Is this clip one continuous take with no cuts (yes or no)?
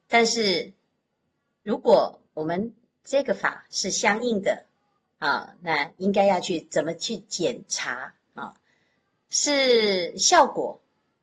yes